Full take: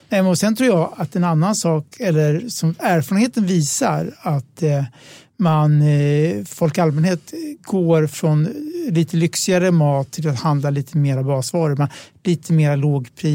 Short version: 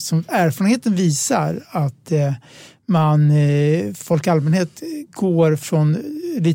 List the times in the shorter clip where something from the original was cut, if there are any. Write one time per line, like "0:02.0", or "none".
none